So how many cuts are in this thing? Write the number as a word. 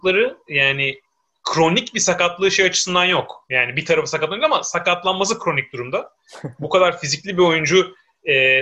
zero